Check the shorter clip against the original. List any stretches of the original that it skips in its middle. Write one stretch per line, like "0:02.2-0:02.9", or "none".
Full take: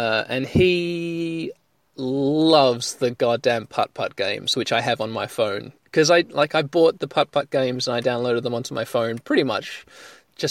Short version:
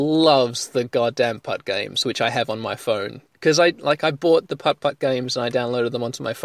0:03.7-0:03.9